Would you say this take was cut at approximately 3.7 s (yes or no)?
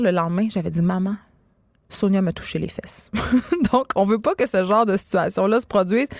no